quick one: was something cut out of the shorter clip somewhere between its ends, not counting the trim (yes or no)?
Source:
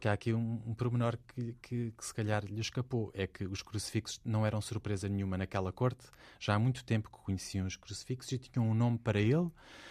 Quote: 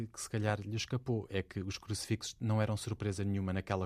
no